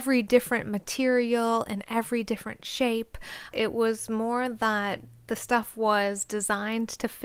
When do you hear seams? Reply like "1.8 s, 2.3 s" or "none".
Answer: 3.5 s